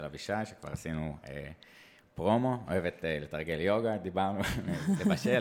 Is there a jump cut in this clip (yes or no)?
no